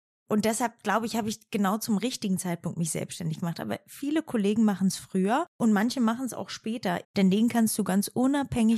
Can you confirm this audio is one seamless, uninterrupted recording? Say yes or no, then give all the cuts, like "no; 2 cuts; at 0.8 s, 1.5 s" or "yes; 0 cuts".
no; 2 cuts; at 5.5 s, 7.0 s